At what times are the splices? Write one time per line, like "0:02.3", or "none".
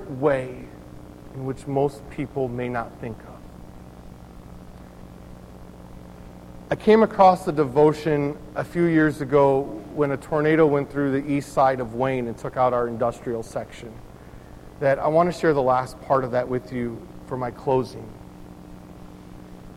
none